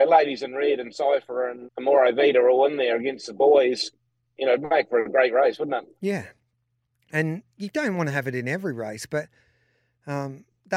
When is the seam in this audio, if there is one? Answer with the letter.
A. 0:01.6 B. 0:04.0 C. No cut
A